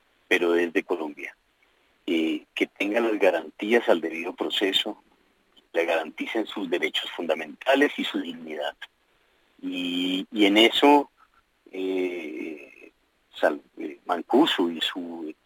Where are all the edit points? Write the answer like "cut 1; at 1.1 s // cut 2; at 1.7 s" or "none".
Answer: none